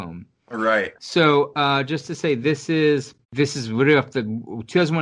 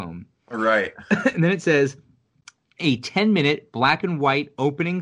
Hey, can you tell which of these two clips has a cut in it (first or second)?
first